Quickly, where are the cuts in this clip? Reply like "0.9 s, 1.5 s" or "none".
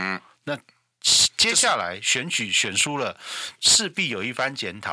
none